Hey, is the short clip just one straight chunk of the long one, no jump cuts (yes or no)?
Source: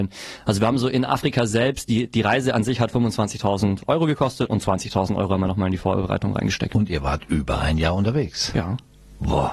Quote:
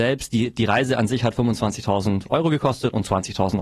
yes